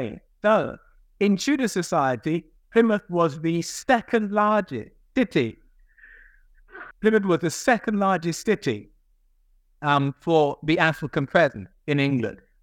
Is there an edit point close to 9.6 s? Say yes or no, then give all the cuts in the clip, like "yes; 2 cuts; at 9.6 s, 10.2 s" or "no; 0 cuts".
no; 1 cut; at 6.9 s